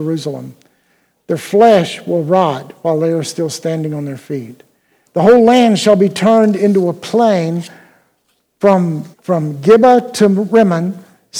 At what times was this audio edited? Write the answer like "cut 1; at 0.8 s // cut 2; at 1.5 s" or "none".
cut 1; at 5.1 s // cut 2; at 9.1 s